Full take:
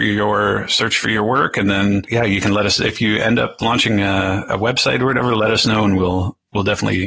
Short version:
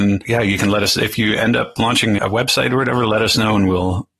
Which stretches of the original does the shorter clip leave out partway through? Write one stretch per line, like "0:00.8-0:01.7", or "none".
0:04.0-0:04.5